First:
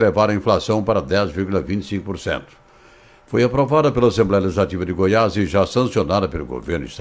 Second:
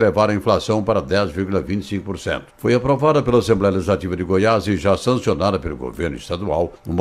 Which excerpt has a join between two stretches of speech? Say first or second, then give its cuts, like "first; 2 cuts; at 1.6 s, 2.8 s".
second; 1 cut; at 2.5 s